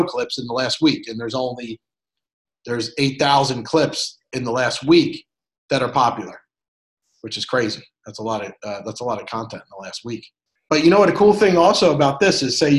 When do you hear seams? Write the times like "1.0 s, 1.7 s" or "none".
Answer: 10.6 s